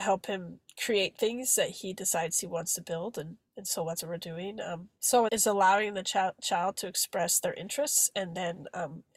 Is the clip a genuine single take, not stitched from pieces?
no; 1 cut; at 5.3 s

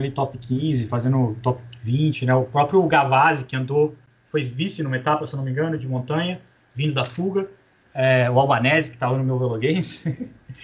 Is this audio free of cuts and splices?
yes; 0 cuts

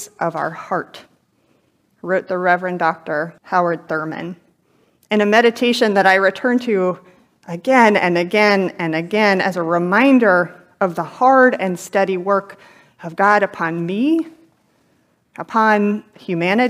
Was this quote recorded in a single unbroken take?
no; 2 cuts; at 3.4 s, 15.3 s

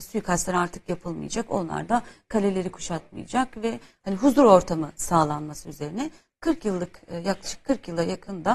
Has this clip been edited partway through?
no; 0 cuts

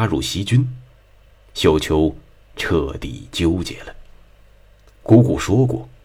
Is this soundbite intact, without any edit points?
yes; 0 cuts

